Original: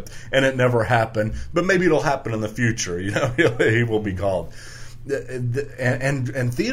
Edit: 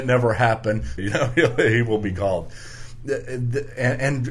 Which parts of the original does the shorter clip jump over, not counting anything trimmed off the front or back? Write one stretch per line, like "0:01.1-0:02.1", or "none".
0:01.5-0:03.0

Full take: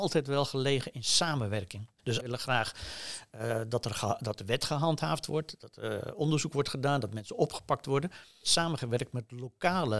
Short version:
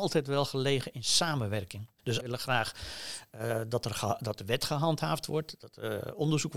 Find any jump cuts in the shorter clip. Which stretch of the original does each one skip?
none

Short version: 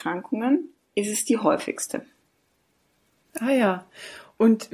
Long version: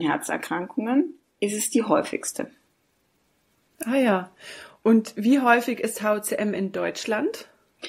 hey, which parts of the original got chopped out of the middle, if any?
none

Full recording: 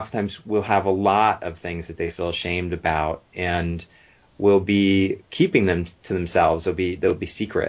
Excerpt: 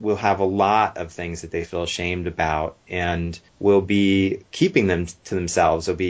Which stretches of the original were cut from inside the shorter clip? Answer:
0:03.9-0:04.3

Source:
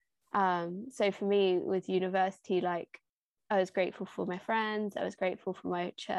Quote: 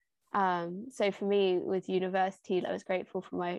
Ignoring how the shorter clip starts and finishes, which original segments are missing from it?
0:02.6-0:04.9

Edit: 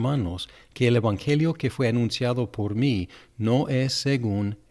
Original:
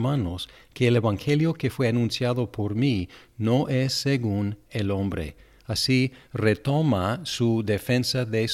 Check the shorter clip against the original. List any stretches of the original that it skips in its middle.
none

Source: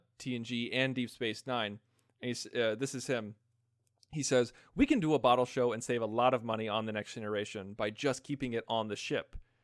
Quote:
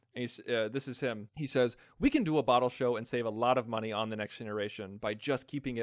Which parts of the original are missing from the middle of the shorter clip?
0:03.4-0:04.0

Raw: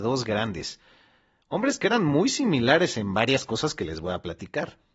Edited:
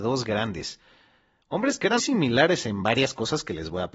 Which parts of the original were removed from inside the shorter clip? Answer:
0:02.0-0:02.3

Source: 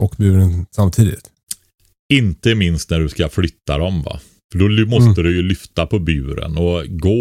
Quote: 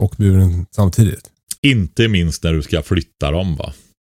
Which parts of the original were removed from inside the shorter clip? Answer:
0:01.6-0:02.0

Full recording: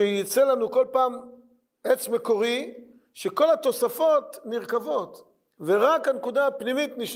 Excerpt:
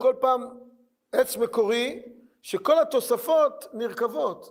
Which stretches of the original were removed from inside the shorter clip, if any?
none

